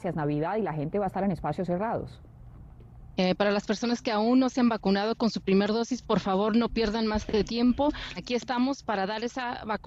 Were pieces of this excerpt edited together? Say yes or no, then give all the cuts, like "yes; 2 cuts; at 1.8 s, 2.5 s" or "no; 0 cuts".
yes; 2 cuts; at 3.2 s, 8.2 s